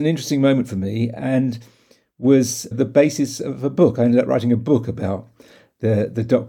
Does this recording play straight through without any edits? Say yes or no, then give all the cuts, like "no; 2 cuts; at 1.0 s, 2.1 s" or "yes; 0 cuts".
no; 1 cut; at 2.7 s